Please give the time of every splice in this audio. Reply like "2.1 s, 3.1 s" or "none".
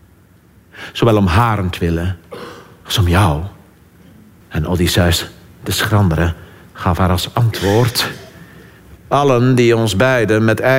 4.4 s, 9.0 s